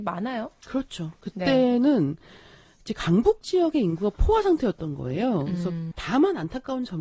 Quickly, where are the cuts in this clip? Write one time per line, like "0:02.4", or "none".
0:05.9